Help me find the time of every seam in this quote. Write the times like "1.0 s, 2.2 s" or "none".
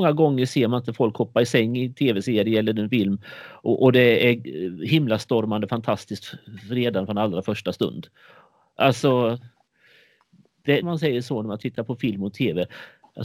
10.8 s